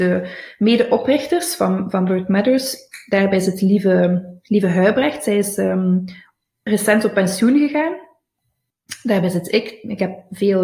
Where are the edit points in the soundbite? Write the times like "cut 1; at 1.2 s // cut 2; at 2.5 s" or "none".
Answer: none